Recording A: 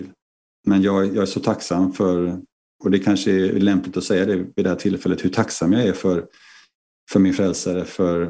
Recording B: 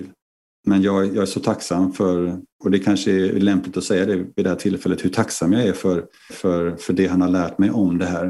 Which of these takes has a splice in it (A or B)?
B